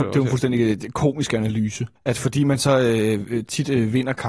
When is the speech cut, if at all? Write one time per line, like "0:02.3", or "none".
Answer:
0:02.0